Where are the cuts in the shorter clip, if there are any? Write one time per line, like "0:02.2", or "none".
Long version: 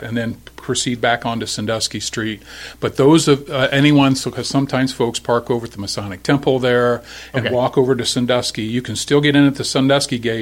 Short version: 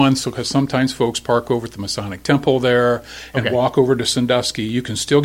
none